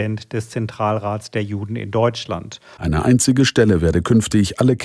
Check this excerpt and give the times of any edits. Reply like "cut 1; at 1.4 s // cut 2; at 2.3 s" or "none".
cut 1; at 2.8 s